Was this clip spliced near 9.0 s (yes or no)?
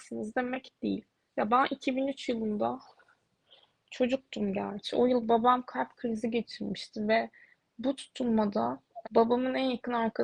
yes